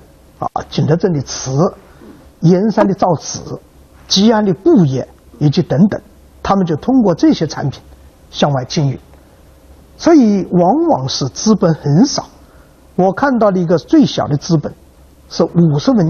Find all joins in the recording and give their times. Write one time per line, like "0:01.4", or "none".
none